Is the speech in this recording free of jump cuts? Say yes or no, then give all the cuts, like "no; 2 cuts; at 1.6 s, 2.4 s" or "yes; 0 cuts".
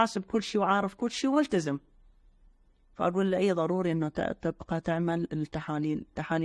yes; 0 cuts